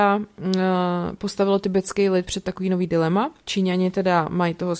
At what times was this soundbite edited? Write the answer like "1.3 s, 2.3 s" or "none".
3.4 s